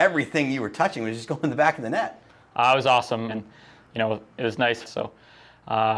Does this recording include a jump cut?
yes; 2 cuts; at 3.3 s, 4.8 s

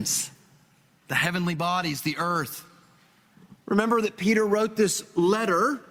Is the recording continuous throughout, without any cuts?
no; 1 cut; at 3.6 s

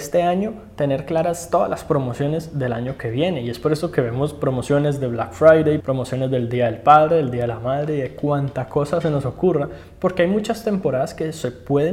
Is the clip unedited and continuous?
no; 1 cut; at 5.8 s

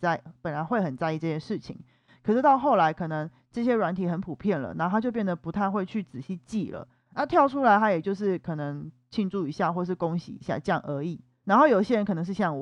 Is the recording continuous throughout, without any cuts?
no; 1 cut; at 11.4 s

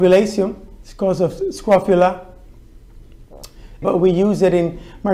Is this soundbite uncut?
no; 1 cut; at 3.8 s

